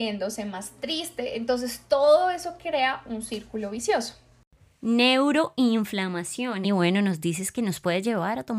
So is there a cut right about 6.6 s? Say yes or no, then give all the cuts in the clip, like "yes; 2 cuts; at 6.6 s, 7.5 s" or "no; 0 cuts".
yes; 1 cut; at 6.6 s